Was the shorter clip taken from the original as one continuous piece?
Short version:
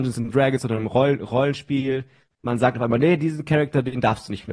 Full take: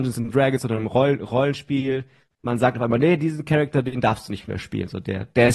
yes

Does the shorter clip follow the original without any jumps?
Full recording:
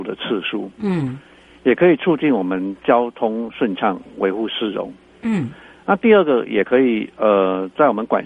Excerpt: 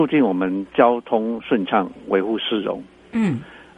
yes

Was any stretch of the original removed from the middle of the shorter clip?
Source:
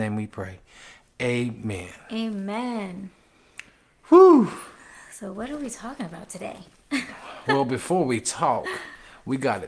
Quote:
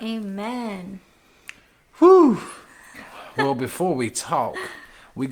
yes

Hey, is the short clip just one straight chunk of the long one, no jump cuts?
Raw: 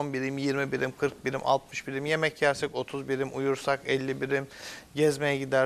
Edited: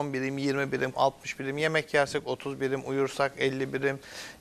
no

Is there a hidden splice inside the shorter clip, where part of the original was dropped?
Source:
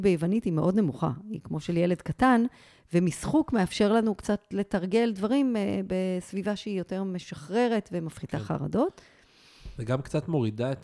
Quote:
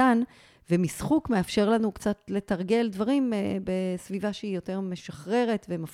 no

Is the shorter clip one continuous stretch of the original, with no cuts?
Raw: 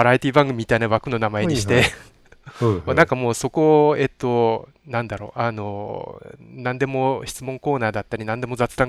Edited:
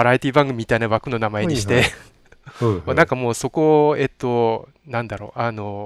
yes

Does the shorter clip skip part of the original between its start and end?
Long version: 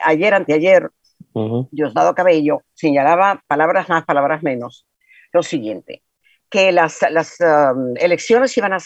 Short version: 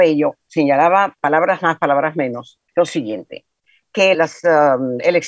yes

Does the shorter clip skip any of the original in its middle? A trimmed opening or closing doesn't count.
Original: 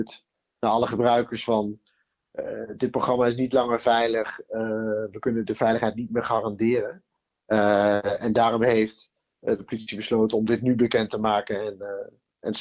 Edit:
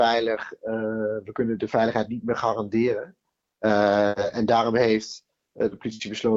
no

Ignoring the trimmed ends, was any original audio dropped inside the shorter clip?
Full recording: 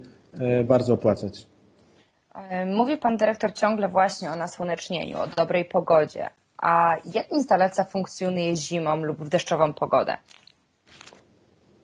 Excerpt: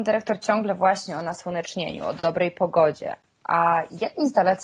no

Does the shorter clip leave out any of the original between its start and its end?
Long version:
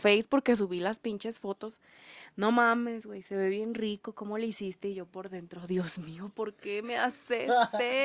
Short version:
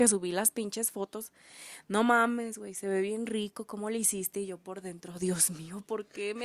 no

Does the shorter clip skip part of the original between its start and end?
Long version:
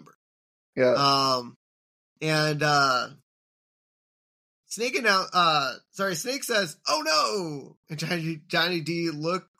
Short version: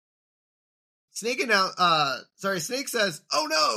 no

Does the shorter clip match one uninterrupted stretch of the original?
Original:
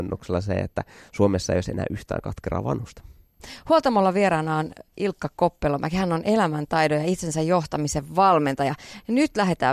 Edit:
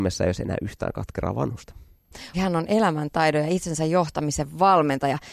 no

